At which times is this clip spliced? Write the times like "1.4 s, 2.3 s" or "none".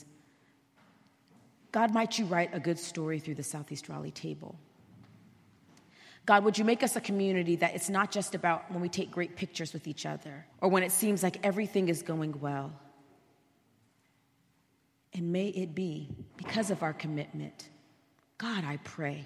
10.5 s, 15.0 s, 16.3 s